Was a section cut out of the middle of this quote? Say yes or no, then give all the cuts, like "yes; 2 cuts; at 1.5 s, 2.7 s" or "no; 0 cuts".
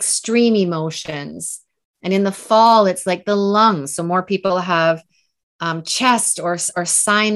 no; 0 cuts